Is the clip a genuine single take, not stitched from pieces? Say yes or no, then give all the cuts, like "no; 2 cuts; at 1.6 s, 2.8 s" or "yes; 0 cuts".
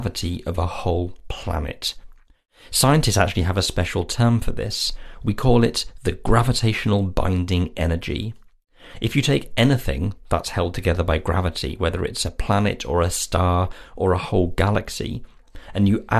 yes; 0 cuts